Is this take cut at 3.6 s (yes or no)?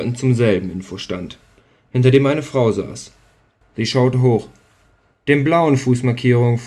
yes